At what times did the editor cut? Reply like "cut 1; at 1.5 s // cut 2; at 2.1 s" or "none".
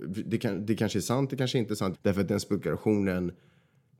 cut 1; at 1.9 s